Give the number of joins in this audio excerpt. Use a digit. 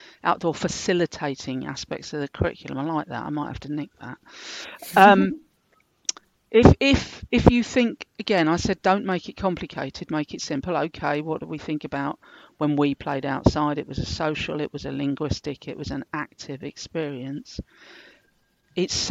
1